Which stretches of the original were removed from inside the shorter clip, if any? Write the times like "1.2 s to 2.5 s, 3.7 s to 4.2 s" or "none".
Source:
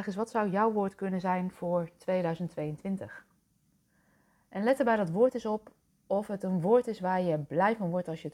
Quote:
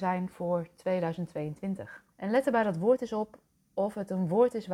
3.3 s to 4.4 s